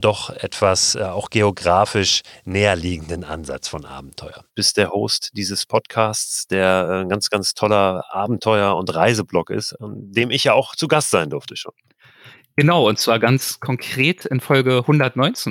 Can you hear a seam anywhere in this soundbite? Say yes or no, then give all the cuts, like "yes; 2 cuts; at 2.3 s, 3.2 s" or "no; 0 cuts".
yes; 1 cut; at 4.5 s